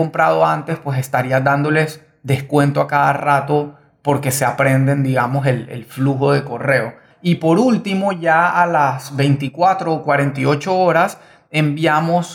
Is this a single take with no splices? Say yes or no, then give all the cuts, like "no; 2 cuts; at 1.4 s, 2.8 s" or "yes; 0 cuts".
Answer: no; 1 cut; at 7.1 s